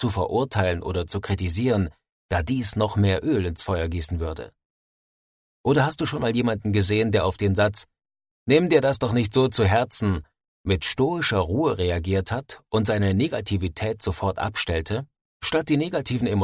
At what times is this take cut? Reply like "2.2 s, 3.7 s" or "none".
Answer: 15.3 s

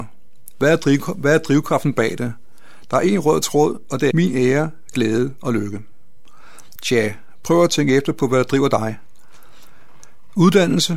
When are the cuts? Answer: 4.1 s, 6.8 s

